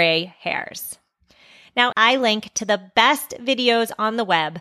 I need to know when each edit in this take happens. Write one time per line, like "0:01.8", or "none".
0:01.9